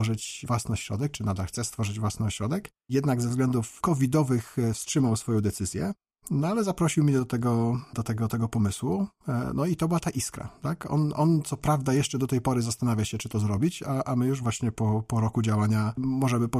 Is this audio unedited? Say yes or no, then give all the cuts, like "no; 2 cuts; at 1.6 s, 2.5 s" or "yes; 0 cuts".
yes; 0 cuts